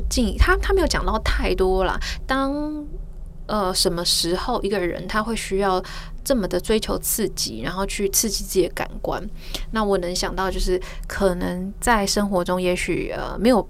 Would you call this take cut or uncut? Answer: cut